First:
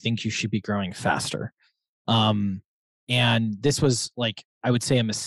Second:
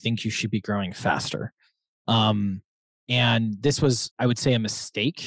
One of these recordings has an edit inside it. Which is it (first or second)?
second